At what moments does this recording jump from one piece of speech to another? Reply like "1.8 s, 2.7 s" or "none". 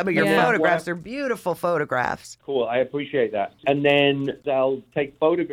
3.6 s